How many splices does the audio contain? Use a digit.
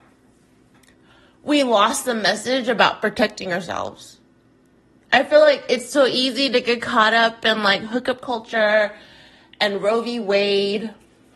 0